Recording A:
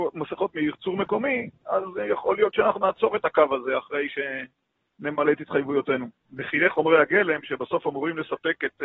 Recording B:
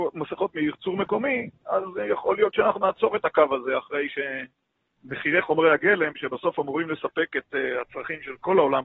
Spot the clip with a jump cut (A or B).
B